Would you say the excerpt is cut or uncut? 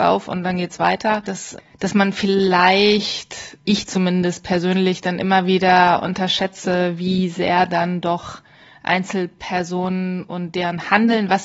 cut